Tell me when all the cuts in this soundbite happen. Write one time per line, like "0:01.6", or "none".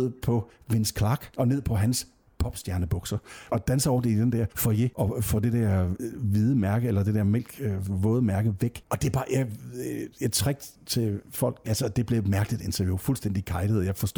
0:03.5
0:11.6